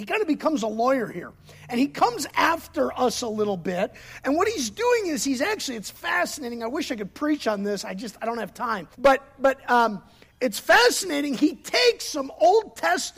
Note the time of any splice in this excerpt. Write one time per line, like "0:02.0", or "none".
0:08.9